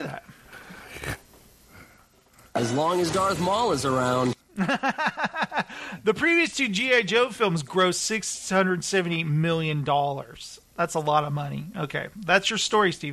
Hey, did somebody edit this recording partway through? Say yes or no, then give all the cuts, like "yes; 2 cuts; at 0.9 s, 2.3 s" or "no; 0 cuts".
no; 0 cuts